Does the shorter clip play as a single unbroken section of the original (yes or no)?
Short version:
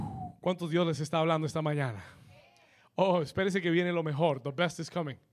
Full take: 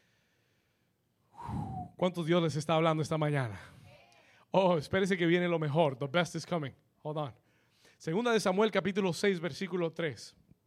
yes